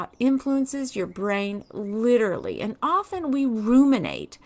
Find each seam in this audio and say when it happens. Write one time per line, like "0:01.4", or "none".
none